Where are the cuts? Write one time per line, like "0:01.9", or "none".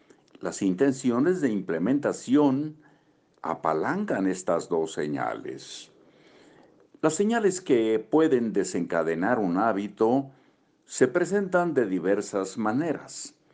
0:06.9